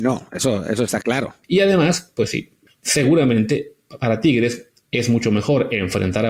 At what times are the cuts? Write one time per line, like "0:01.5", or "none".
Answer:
0:01.4
0:02.7